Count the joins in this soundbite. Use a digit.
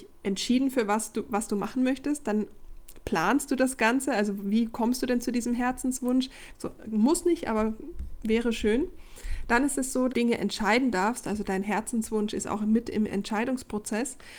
2